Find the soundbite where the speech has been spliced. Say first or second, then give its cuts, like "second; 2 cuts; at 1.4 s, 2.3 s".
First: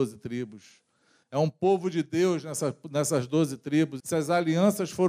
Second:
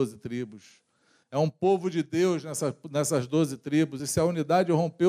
first; 1 cut; at 4.0 s